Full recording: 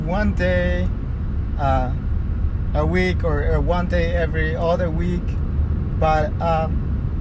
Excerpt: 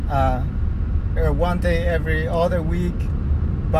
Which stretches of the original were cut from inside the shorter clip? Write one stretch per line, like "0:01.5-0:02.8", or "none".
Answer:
0:02.7-0:03.4